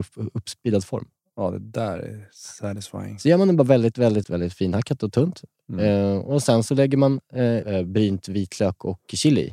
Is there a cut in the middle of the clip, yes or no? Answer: yes